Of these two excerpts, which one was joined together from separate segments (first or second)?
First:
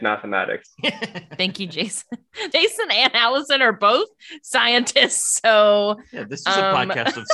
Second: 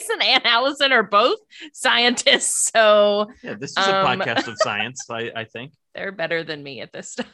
first